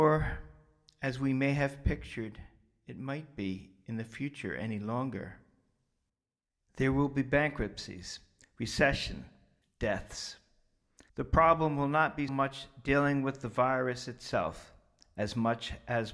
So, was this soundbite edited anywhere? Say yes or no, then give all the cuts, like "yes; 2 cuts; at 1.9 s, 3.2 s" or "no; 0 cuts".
yes; 3 cuts; at 9.6 s, 11.1 s, 12.3 s